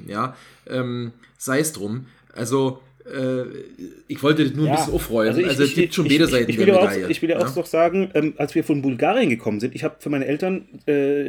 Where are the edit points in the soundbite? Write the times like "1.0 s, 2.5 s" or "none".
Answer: none